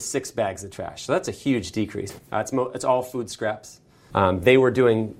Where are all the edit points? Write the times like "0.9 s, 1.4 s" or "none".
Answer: 2.2 s, 4.1 s